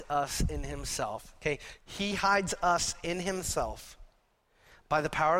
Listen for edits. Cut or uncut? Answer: cut